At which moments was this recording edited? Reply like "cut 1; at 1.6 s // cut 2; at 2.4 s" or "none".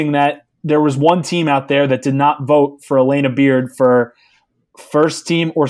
none